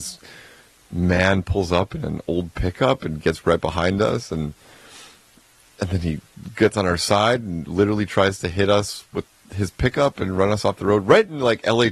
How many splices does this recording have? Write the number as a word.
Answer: zero